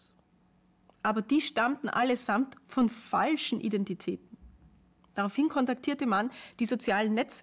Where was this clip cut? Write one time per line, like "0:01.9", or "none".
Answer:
none